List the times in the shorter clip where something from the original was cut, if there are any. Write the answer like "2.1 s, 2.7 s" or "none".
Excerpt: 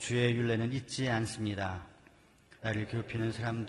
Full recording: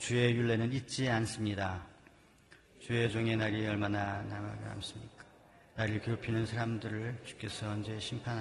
2.6 s